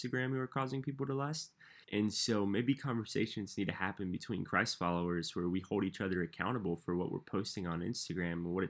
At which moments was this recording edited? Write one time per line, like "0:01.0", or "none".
0:01.8

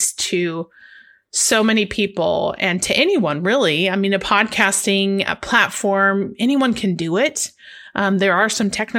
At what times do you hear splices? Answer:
none

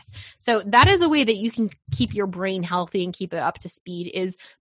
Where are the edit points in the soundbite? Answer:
none

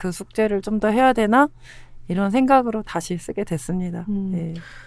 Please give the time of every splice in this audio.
none

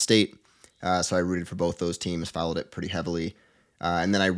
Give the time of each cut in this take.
none

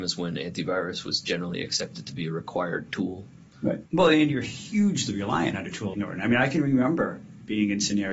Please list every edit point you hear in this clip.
0:03.9
0:05.9

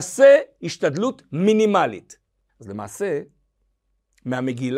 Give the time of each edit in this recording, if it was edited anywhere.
0:02.5

